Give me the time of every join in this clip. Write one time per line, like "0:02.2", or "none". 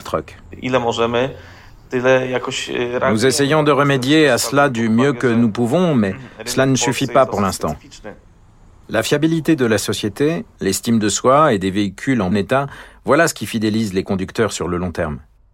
0:10.6
0:12.3